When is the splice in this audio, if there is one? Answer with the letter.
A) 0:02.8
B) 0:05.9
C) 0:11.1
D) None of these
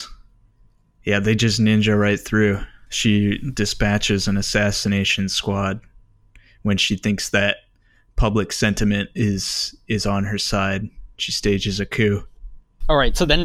D